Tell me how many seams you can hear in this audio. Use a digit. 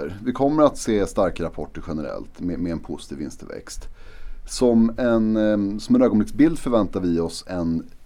0